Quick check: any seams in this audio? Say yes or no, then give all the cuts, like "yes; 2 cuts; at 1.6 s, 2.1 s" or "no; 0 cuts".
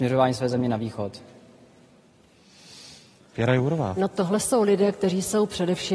no; 0 cuts